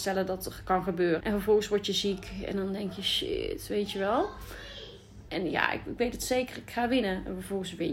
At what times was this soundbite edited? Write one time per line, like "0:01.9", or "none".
0:01.2
0:05.3